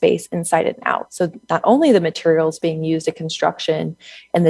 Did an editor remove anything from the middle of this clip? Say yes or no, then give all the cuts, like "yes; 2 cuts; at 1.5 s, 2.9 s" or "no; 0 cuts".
no; 0 cuts